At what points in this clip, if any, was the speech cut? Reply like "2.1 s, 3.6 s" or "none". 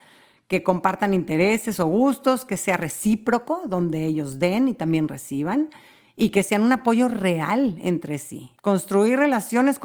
8.6 s